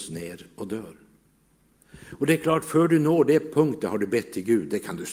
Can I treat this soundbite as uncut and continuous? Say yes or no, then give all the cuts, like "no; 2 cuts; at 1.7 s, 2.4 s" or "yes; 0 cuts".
yes; 0 cuts